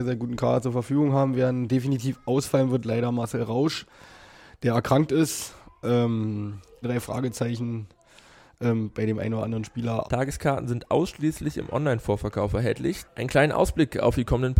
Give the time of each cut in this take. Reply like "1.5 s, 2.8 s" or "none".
6.8 s, 10.0 s, 13.0 s